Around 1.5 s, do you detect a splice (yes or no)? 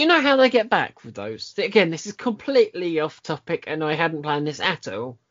no